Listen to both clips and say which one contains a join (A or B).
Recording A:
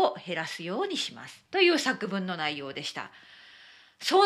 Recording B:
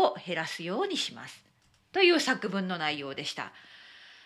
A